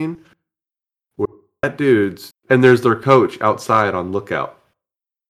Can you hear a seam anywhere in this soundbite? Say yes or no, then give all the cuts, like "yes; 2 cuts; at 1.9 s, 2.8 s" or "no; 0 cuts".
yes; 1 cut; at 2.3 s